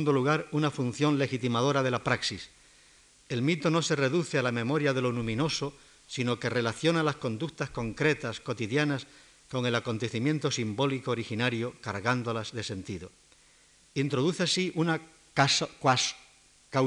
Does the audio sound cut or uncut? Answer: cut